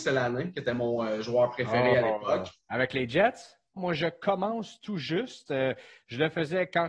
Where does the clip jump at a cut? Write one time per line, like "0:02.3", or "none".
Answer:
0:03.8